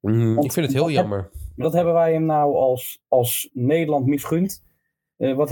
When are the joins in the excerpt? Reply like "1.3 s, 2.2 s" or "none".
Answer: none